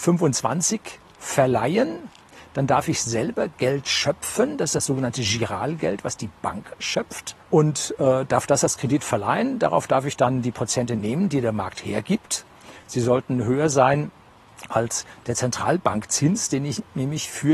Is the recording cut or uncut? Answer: cut